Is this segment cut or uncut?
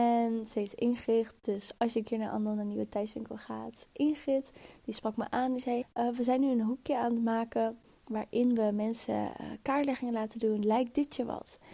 cut